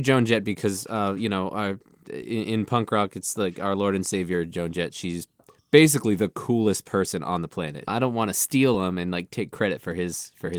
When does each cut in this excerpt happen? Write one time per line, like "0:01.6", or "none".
0:07.9